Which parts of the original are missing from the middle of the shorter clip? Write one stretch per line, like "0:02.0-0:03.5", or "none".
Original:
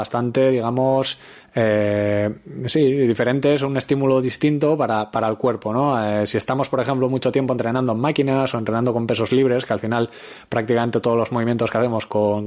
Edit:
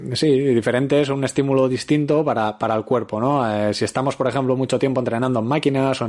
none